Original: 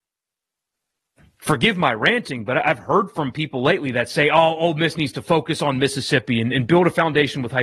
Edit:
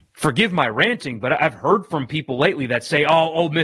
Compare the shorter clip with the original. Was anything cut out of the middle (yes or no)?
no